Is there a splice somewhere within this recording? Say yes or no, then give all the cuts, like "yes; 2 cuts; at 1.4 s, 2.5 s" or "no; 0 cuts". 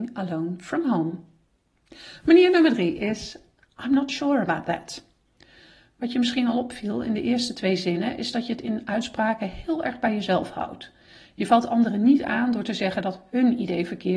no; 0 cuts